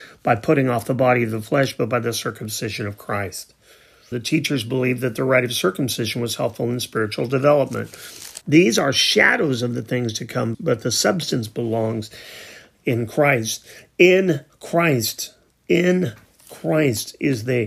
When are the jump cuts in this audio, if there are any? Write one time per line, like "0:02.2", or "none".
0:04.1
0:08.4
0:10.5